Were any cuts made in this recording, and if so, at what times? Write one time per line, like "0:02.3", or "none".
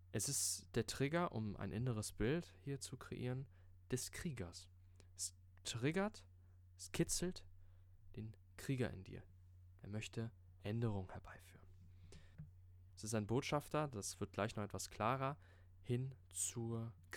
0:09.8
0:12.9